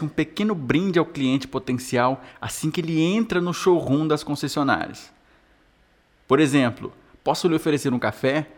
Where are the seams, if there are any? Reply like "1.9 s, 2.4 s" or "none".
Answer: none